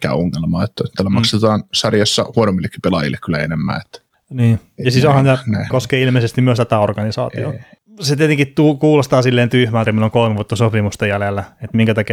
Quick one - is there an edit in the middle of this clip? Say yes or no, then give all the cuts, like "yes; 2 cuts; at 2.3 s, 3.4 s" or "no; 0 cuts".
yes; 3 cuts; at 5.7 s, 7.8 s, 9.9 s